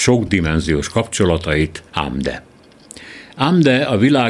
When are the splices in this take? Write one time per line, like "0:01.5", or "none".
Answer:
0:01.9